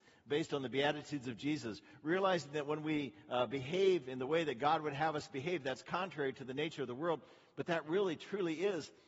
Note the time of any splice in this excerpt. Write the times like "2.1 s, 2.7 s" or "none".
none